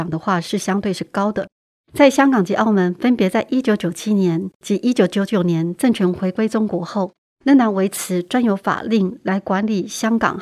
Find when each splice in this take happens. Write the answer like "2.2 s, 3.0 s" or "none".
1.8 s, 7.3 s